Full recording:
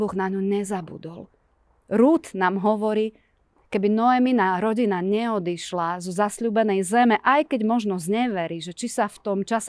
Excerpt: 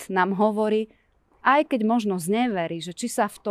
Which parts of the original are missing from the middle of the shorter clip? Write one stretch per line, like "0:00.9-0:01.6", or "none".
0:03.7-0:07.2